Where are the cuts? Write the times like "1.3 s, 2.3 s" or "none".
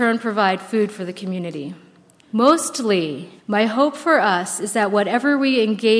2.2 s, 3.4 s